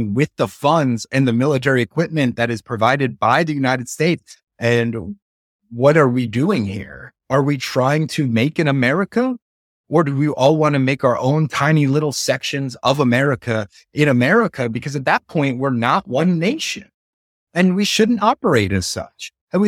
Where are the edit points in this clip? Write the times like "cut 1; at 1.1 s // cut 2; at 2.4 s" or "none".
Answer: cut 1; at 4.5 s